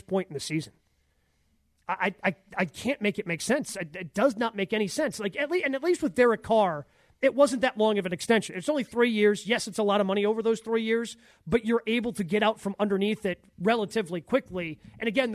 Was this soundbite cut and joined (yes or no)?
no